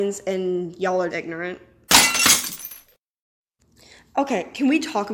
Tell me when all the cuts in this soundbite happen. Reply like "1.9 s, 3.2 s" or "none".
1.1 s